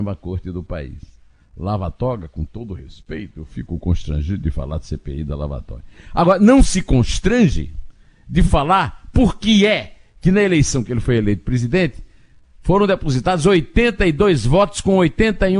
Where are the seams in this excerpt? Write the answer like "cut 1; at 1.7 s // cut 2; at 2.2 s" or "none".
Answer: none